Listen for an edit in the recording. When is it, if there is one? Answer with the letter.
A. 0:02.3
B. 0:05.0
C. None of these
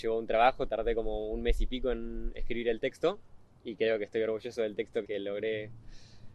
B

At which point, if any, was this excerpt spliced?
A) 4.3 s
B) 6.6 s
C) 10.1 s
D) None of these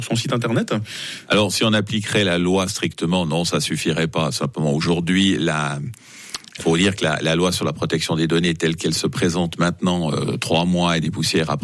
B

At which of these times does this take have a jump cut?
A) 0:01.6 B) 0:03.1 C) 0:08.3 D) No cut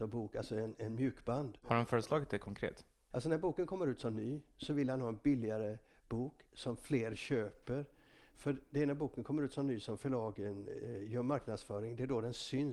B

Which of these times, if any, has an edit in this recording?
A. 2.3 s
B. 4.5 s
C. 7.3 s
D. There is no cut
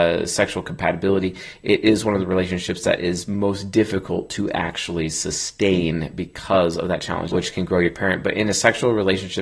C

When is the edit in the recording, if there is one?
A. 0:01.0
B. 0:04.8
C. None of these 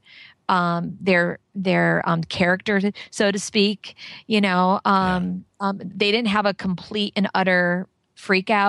C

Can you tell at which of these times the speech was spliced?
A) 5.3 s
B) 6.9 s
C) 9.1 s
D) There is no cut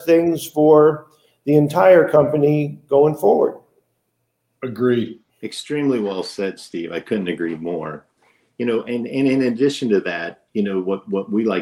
A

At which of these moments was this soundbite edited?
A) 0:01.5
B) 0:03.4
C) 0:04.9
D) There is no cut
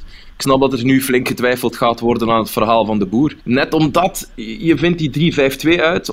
B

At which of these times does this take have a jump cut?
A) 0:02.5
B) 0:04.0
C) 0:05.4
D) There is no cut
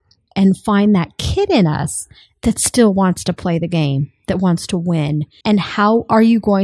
C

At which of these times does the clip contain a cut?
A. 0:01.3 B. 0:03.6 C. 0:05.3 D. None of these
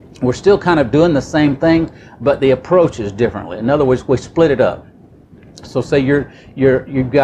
D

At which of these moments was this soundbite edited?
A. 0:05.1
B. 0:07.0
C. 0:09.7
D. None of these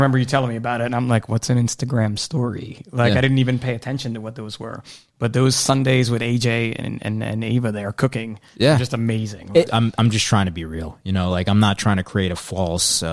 C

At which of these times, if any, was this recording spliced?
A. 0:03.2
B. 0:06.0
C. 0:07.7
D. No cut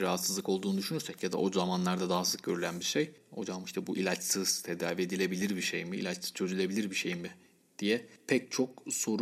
A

